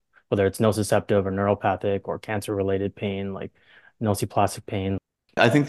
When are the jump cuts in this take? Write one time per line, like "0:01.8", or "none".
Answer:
none